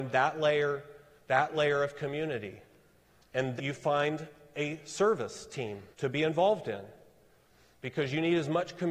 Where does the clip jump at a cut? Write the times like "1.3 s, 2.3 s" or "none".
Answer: 3.6 s, 5.9 s